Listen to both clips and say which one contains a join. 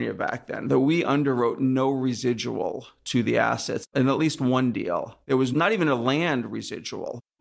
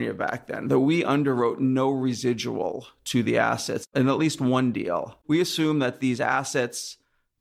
second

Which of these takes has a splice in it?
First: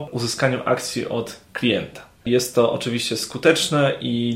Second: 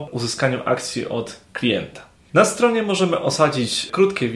first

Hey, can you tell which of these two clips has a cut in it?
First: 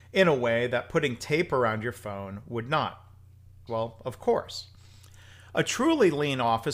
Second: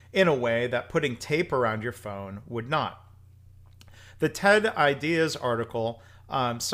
first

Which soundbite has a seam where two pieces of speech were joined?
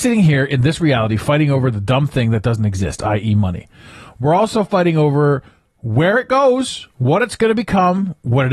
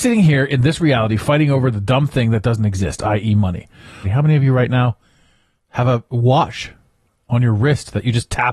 second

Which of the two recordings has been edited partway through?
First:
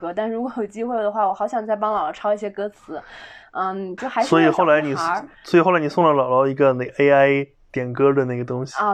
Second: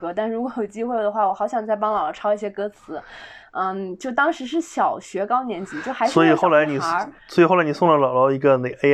first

